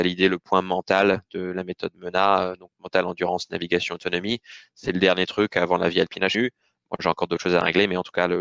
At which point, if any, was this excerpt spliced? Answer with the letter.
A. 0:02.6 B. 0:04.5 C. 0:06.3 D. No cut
C